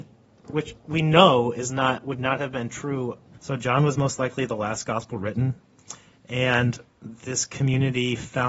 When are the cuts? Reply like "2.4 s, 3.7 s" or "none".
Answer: 3.4 s, 6.9 s